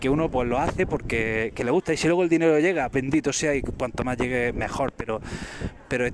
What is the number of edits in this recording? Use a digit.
1